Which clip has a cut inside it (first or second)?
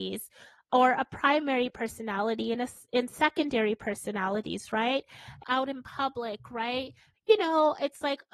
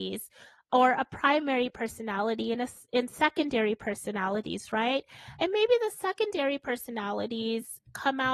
first